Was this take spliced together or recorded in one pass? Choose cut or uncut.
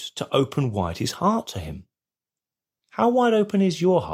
cut